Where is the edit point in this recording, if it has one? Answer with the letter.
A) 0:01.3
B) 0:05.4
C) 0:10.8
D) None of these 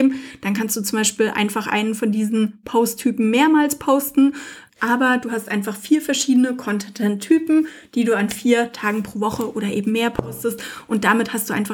D